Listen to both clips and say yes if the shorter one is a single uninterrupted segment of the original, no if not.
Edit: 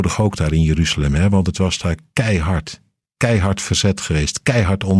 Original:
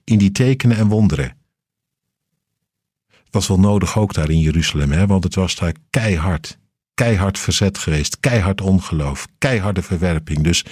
yes